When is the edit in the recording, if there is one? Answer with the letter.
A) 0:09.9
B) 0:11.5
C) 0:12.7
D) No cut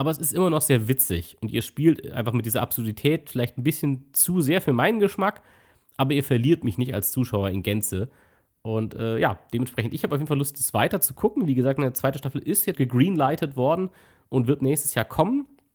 C